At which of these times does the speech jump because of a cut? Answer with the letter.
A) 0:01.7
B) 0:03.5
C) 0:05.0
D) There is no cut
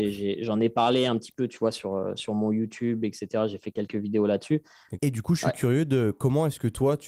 C